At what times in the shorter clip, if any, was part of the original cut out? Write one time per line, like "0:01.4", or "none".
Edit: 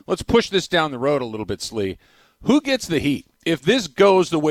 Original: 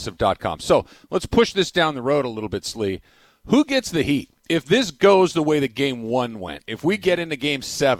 none